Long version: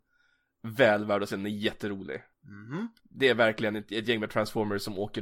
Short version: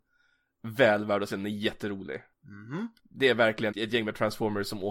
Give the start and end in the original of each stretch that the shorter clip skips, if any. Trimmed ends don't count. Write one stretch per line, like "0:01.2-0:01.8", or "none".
0:03.7-0:03.9